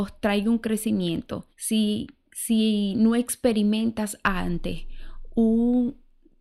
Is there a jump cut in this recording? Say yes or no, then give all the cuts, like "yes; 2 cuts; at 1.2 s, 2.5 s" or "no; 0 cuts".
yes; 1 cut; at 1.5 s